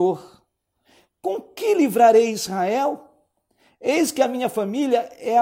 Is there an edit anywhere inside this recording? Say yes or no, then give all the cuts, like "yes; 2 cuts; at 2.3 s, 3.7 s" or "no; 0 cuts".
no; 0 cuts